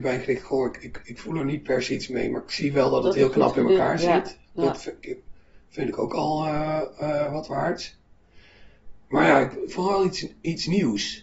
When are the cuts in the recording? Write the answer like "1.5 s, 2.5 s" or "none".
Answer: 9.0 s